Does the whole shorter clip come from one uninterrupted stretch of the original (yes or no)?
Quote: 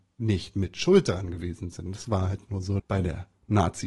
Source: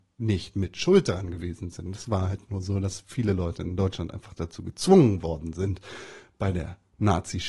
no